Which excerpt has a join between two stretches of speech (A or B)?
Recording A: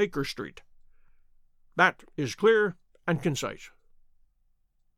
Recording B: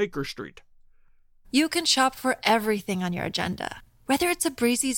B